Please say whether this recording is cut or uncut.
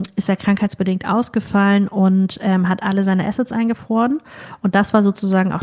uncut